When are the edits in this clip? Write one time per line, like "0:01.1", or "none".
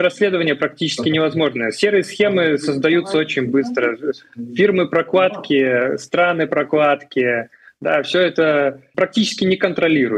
none